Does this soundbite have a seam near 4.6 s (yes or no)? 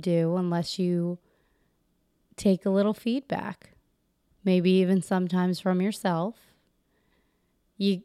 no